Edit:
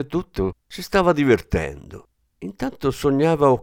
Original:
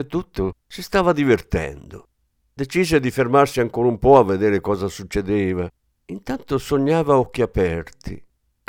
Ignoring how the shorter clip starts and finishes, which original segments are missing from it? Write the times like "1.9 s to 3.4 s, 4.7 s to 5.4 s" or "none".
2.4 s to 6.1 s